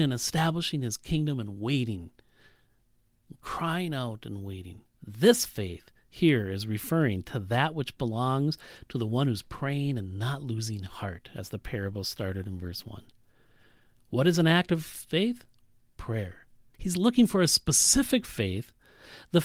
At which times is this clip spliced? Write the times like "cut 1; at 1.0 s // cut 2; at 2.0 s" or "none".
cut 1; at 4.9 s // cut 2; at 16.7 s